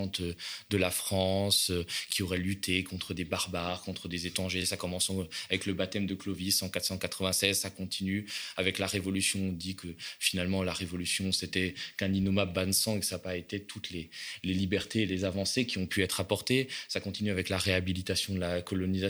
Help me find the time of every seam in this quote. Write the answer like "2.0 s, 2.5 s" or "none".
none